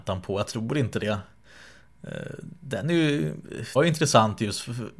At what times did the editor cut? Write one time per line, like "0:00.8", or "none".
0:03.8